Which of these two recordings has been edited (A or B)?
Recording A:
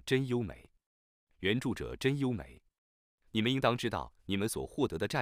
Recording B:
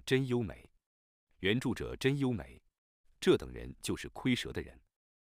B